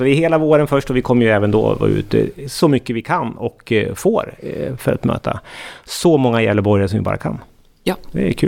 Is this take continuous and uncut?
yes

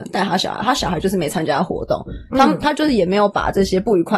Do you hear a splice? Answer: no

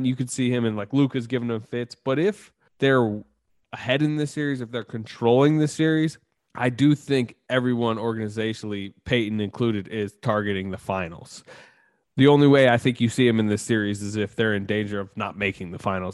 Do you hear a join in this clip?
no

